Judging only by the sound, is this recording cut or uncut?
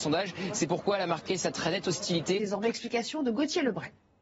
cut